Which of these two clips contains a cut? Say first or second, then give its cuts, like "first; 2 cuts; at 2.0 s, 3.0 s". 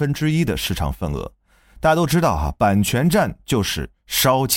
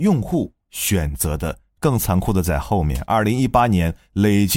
second; 1 cut; at 1.8 s